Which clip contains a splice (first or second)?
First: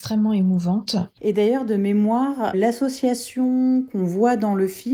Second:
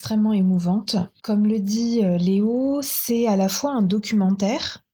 first